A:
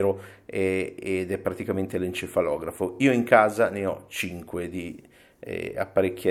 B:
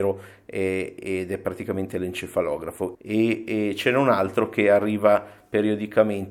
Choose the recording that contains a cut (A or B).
B